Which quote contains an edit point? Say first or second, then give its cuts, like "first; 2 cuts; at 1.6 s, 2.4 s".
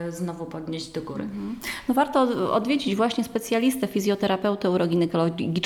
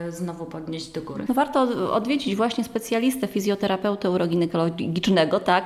second; 1 cut; at 1.3 s